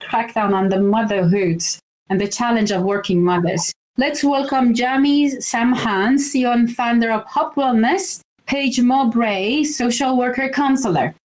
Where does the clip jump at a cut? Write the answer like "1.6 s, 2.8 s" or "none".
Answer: none